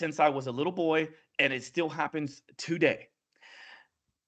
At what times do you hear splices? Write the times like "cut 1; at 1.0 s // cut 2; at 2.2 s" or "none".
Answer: none